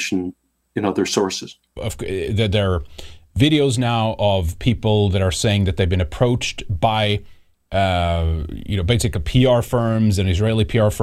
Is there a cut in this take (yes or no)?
yes